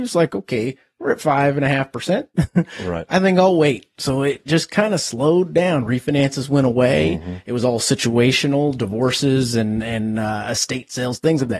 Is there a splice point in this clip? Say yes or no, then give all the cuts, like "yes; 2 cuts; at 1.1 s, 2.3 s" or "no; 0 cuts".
no; 0 cuts